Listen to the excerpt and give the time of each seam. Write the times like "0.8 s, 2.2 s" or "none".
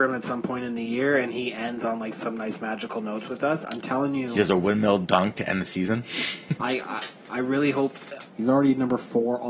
6.6 s, 8.3 s